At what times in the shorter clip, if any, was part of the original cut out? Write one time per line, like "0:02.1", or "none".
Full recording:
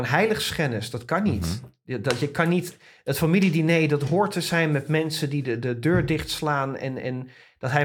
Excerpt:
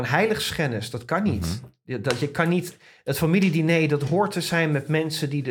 none